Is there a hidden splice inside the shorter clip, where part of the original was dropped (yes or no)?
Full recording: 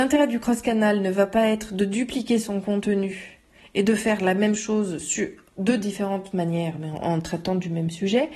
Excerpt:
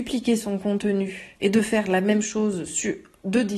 yes